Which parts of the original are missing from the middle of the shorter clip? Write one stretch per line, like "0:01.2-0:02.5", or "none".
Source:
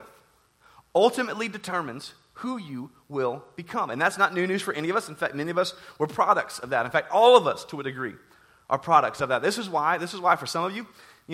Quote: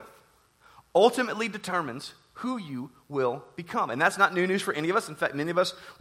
none